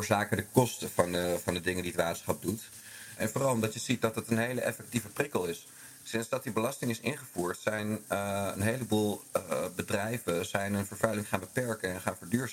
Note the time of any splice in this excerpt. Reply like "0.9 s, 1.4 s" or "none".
3.2 s